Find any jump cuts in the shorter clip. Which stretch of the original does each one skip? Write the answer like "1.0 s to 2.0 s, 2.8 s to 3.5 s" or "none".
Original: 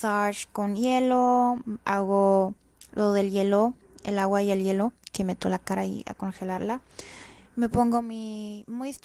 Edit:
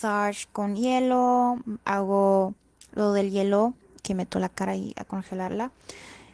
4.0 s to 5.1 s